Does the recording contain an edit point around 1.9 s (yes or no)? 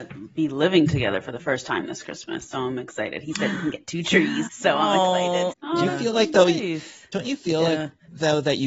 no